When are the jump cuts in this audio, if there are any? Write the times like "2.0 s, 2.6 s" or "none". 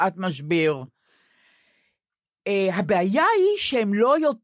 none